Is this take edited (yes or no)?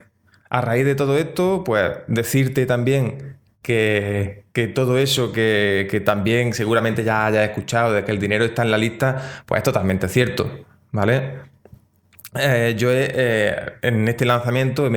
no